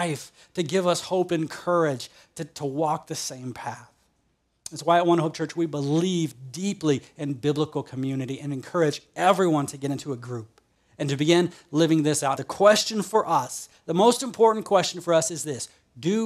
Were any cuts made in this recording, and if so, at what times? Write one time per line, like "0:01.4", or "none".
0:12.3